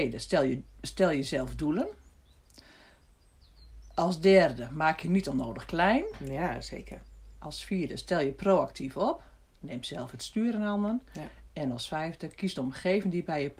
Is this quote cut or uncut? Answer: uncut